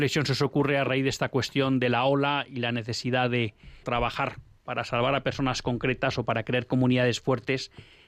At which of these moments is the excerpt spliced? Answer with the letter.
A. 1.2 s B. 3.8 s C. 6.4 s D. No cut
B